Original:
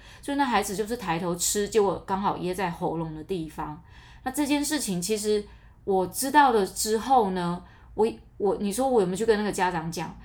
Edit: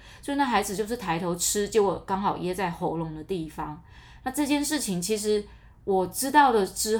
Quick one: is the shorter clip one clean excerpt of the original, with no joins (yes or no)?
yes